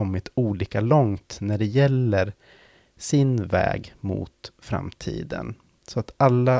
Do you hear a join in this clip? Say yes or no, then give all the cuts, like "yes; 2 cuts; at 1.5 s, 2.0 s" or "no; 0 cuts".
no; 0 cuts